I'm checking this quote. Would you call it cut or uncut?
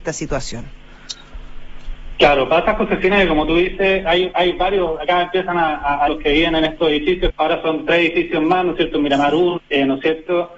cut